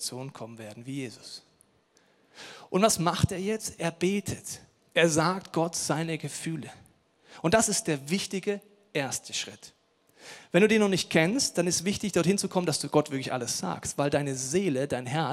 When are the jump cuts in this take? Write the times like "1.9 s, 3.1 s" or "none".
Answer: none